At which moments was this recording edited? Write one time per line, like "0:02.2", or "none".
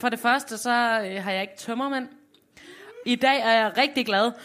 0:03.0